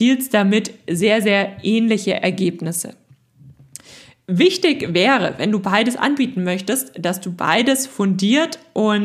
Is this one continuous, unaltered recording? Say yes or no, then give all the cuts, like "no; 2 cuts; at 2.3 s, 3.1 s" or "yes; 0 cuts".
yes; 0 cuts